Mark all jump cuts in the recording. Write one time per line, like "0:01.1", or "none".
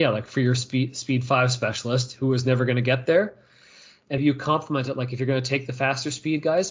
0:04.2